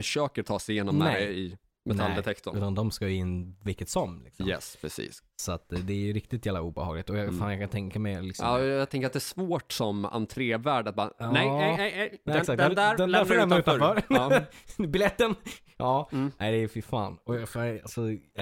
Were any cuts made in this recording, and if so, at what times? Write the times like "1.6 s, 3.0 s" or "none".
none